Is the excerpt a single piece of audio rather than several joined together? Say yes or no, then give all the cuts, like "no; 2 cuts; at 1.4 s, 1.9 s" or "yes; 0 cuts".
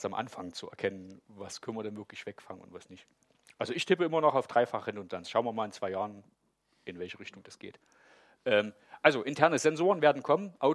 yes; 0 cuts